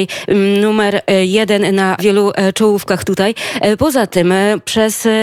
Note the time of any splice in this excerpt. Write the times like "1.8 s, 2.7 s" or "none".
2.0 s